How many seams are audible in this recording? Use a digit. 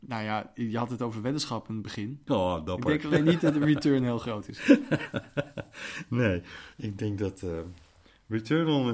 1